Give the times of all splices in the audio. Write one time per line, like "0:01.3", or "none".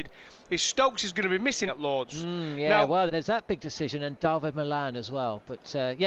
0:01.7
0:03.1